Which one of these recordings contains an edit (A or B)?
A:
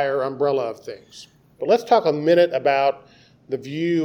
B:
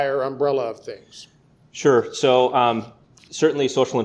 A